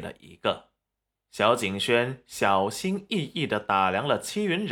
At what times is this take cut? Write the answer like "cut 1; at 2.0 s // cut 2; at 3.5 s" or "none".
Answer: cut 1; at 1.1 s